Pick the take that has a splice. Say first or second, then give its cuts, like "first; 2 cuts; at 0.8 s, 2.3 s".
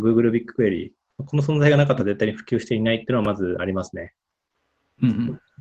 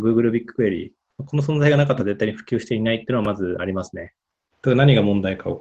second; 1 cut; at 4.5 s